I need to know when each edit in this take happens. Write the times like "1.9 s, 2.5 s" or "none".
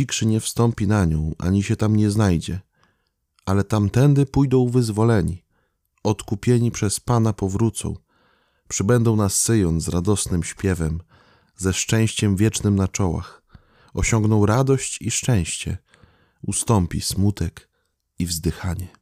none